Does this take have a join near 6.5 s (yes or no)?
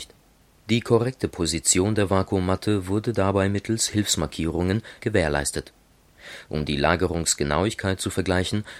no